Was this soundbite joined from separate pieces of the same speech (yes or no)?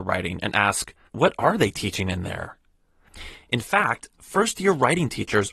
yes